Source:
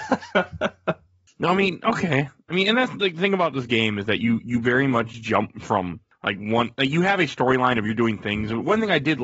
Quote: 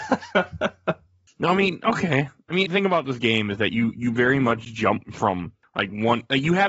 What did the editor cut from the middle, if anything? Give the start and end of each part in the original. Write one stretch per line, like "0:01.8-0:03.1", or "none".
0:02.6-0:03.1